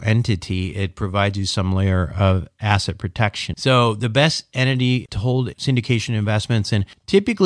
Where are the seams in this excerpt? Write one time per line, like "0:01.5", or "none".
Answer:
0:03.5
0:05.1